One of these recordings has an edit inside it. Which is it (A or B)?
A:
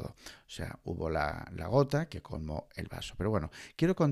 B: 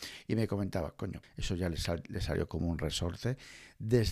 B